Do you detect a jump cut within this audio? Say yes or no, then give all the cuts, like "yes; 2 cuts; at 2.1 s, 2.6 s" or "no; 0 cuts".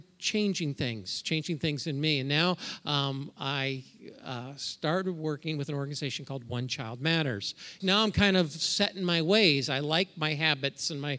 yes; 1 cut; at 7.8 s